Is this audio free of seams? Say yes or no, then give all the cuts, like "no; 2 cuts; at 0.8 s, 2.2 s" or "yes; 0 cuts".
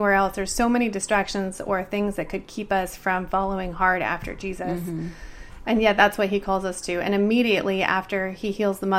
yes; 0 cuts